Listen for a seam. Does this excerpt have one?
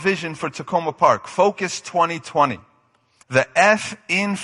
yes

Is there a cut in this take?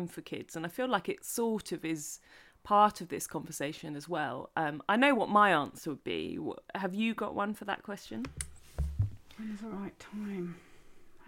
no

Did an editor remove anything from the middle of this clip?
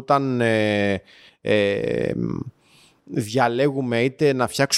no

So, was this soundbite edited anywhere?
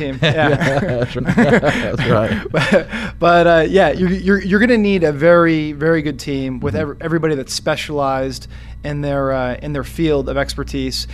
yes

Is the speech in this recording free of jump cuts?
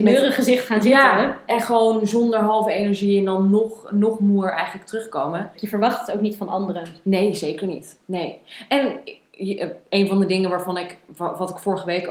no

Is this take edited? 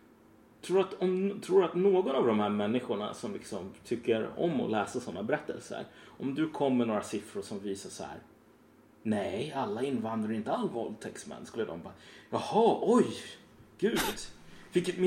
no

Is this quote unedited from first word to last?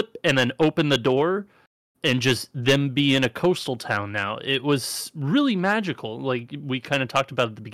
yes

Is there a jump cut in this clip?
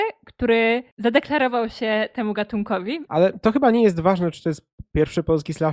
yes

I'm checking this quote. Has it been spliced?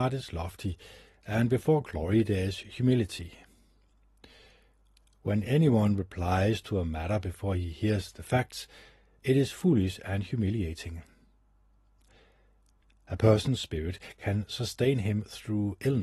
no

